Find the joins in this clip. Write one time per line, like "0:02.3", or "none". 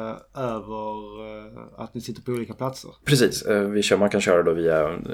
none